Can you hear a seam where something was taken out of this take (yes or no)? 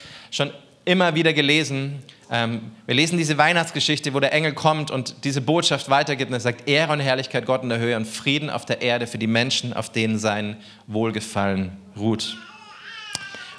no